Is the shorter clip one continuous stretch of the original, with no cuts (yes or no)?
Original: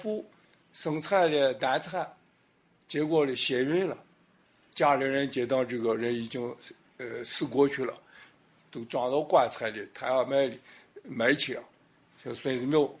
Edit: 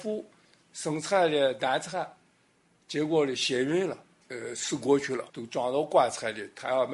no